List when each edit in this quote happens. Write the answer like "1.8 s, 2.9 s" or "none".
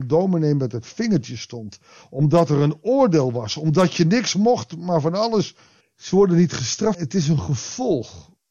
5.8 s, 6.9 s